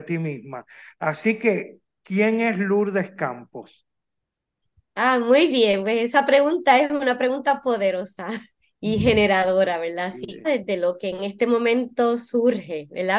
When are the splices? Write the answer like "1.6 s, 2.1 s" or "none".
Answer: 10.4 s